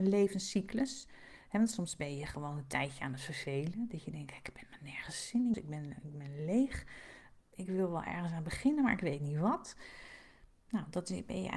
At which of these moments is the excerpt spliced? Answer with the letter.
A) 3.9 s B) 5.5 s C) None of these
B